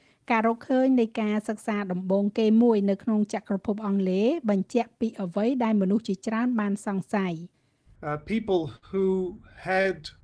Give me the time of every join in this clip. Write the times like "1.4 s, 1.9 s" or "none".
none